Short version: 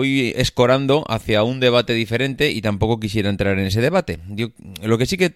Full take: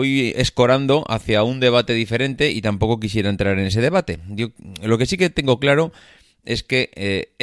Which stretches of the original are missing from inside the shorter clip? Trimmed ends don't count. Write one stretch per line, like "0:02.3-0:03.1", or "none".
none